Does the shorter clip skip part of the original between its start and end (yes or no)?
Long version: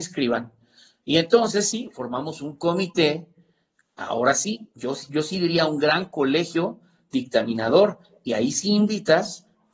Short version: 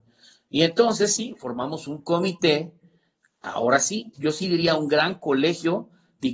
yes